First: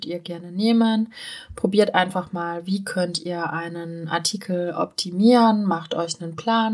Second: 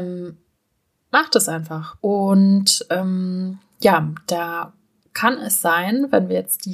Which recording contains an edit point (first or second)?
second